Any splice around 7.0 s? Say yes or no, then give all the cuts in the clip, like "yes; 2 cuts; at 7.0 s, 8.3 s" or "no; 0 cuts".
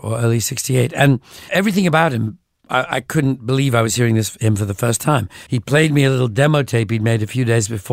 no; 2 cuts; at 1.5 s, 5.5 s